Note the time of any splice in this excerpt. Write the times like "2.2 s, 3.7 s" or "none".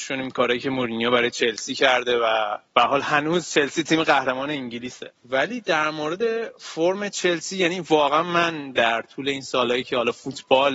2.6 s, 5.2 s